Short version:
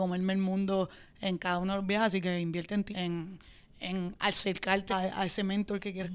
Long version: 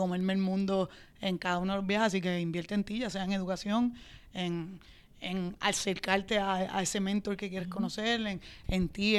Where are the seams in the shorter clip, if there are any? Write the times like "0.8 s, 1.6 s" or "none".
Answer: 2.9 s, 4.9 s